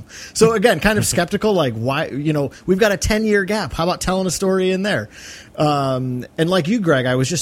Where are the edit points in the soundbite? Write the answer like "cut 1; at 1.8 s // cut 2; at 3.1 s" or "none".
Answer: cut 1; at 6.3 s